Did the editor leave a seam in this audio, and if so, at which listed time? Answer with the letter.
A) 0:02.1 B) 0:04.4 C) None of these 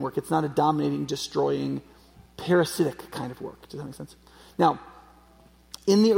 A